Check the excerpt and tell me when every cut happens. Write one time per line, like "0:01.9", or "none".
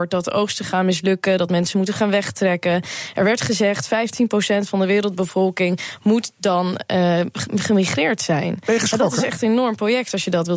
none